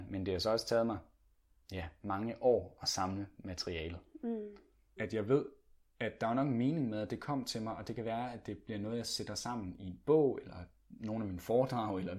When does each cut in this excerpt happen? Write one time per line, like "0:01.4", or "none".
0:05.0